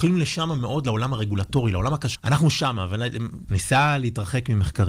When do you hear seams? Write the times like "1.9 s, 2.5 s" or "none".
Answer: 2.1 s, 3.5 s